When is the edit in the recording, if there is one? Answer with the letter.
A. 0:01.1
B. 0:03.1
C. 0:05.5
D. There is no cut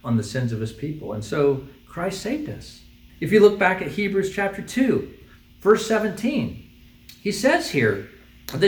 B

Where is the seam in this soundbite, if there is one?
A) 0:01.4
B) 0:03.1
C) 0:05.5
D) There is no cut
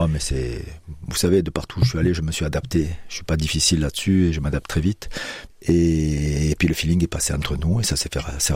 C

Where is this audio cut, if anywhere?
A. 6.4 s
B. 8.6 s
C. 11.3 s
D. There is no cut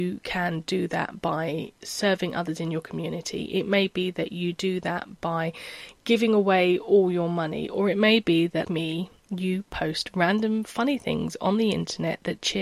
B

